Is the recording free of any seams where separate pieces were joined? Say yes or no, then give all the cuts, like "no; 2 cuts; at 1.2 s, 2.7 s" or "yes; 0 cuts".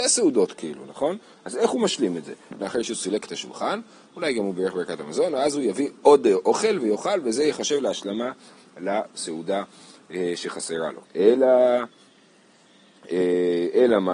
no; 2 cuts; at 2.6 s, 11.0 s